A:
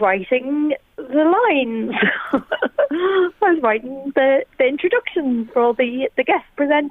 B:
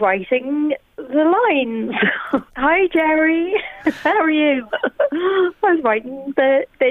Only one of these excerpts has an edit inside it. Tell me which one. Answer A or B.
B